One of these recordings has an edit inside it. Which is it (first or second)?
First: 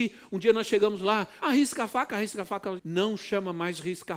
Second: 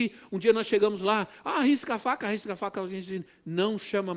first